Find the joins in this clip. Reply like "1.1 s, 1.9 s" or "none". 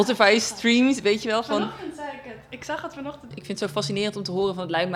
3.3 s